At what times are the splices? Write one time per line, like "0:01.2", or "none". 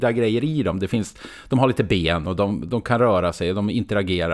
none